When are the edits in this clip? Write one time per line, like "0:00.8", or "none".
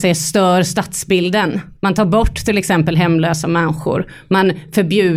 0:01.7